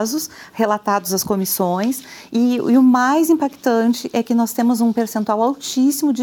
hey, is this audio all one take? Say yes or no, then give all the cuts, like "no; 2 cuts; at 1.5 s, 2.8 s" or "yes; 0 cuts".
yes; 0 cuts